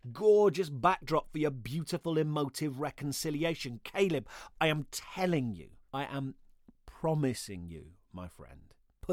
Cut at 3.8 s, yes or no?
no